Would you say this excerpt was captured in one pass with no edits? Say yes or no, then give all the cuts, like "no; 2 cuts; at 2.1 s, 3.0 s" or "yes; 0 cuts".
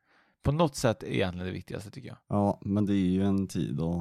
no; 1 cut; at 2.2 s